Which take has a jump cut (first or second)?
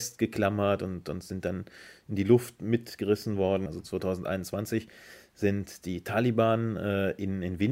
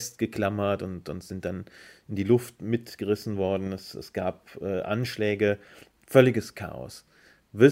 first